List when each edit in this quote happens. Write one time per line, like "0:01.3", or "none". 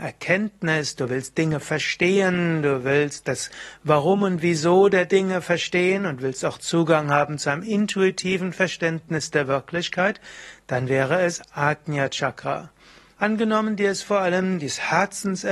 0:13.1